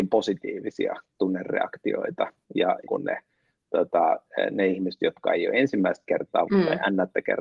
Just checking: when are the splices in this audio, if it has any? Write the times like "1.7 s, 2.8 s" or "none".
2.9 s, 6.5 s